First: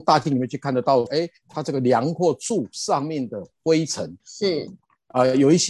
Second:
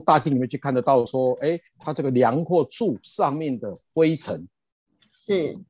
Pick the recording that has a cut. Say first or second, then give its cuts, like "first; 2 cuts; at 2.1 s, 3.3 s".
first; 2 cuts; at 1.1 s, 4.2 s